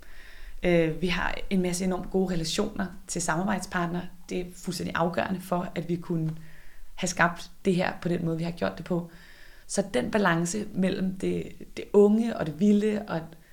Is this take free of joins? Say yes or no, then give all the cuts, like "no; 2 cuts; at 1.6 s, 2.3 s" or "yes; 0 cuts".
no; 1 cut; at 9.6 s